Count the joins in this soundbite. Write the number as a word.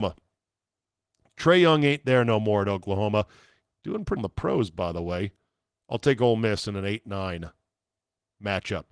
one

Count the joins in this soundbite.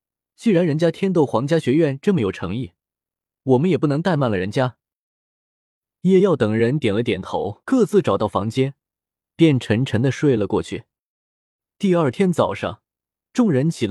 two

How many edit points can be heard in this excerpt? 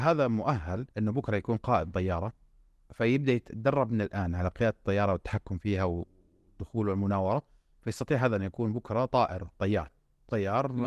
one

